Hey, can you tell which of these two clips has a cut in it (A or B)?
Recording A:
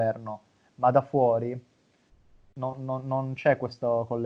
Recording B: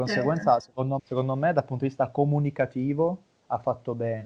B